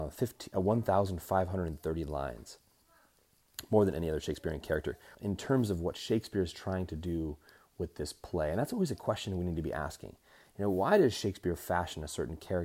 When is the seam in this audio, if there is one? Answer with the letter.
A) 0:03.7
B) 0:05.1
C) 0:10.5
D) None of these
B